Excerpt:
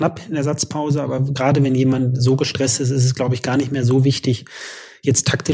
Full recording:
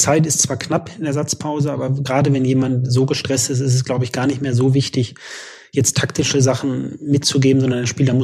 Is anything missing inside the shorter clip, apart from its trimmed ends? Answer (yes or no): no